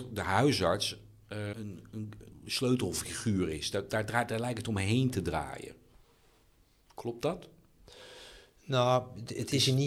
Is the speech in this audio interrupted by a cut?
yes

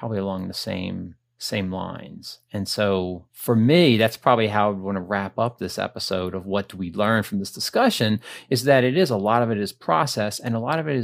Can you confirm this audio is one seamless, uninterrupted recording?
no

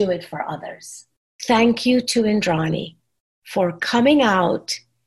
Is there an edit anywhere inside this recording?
yes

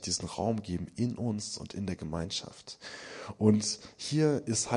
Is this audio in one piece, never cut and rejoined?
yes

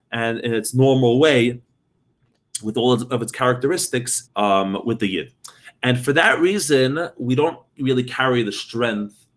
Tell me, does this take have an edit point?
yes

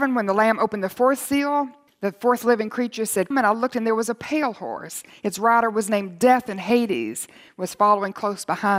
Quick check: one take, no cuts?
no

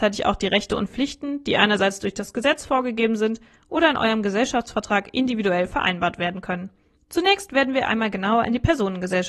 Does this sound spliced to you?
yes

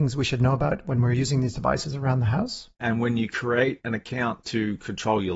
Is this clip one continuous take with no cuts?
no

